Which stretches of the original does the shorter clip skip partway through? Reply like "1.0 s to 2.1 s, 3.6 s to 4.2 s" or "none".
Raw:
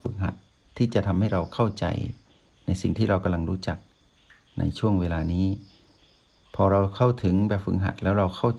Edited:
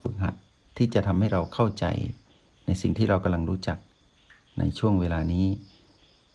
none

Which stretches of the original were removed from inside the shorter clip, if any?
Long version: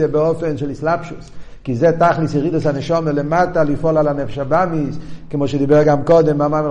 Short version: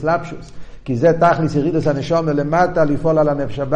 none

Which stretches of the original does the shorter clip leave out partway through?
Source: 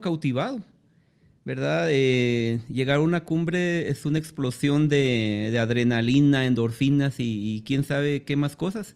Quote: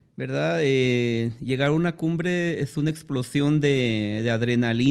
none

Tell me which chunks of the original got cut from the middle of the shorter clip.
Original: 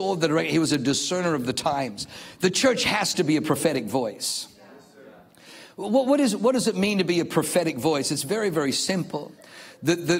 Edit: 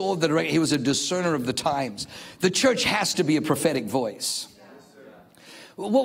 none

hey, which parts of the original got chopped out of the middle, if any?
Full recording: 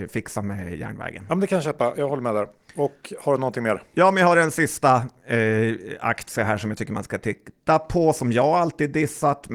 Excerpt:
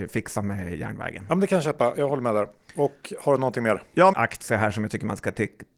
4.1 s to 6.0 s

